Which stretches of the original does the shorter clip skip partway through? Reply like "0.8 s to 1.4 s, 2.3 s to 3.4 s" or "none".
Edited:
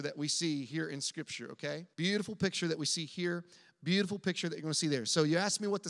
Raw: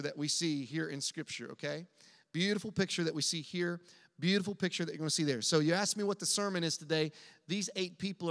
1.9 s to 2.3 s